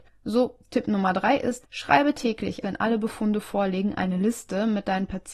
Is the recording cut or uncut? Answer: cut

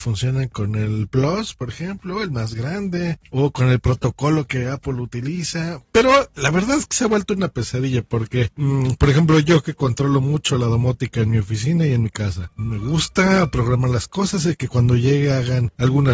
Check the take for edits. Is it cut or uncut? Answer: cut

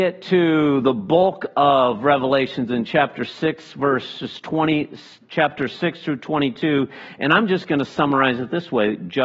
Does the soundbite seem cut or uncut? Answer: uncut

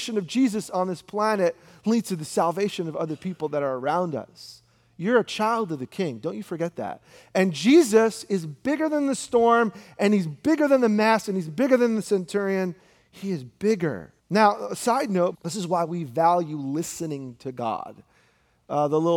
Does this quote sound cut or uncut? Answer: cut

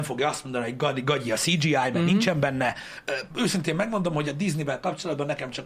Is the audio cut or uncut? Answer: cut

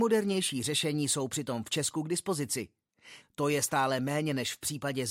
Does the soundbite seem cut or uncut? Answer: cut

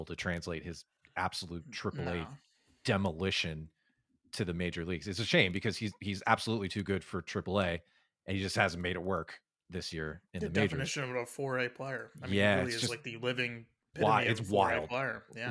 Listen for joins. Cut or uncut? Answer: cut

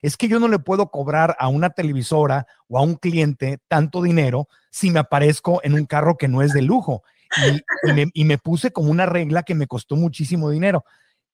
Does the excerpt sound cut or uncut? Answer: uncut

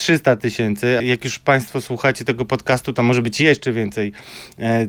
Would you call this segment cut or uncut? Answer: cut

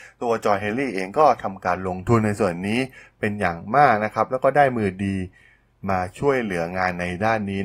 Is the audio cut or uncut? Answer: uncut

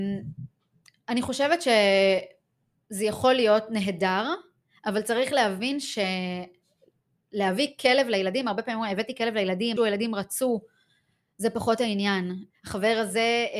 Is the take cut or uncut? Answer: cut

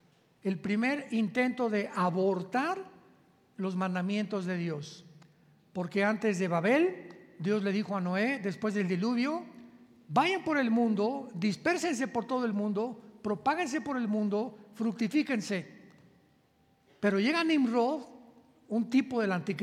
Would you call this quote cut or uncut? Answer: uncut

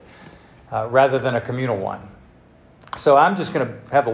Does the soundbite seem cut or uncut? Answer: uncut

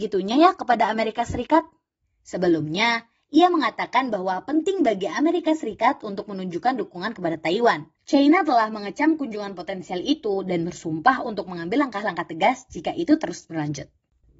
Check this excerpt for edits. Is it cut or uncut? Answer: cut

